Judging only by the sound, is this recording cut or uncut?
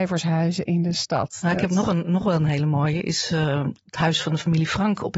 cut